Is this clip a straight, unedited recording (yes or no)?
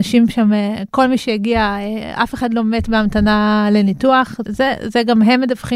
no